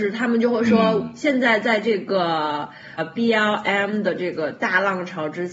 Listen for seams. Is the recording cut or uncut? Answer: cut